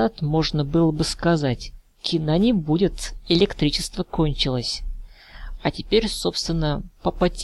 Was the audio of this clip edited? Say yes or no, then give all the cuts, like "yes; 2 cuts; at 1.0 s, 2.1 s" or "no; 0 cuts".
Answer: yes; 1 cut; at 5.6 s